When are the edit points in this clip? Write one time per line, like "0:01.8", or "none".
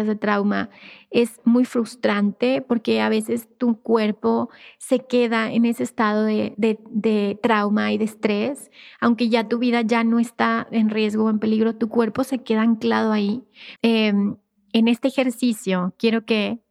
0:06.5
0:13.8